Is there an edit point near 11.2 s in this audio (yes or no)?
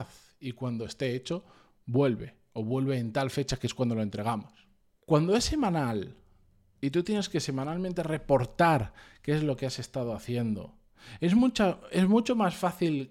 no